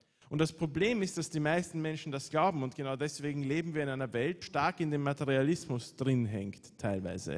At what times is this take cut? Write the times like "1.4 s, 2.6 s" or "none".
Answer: 4.4 s